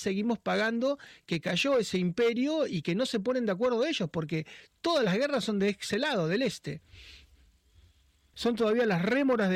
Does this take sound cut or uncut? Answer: cut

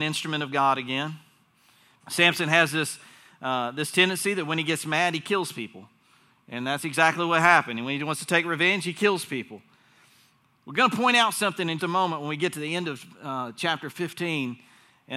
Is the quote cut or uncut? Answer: cut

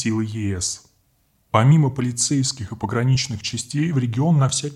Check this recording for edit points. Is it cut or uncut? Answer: uncut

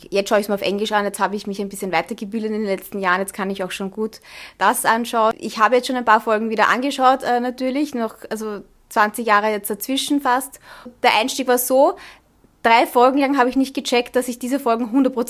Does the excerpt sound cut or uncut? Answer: uncut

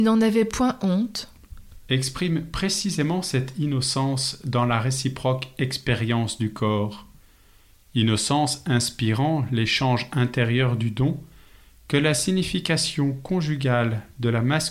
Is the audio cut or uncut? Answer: uncut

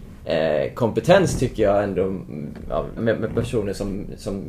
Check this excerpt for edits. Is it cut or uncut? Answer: cut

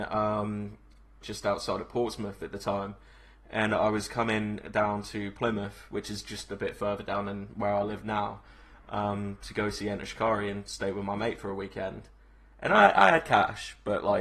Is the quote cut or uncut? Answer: cut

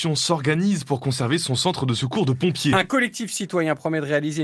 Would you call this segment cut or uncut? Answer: uncut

